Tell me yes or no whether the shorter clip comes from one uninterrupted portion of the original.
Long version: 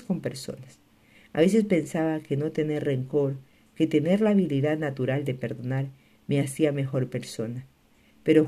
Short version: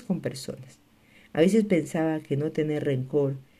yes